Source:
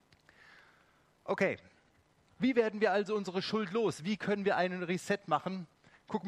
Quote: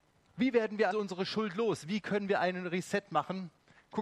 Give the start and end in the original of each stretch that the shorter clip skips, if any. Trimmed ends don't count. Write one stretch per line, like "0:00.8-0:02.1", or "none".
0:02.9-0:03.1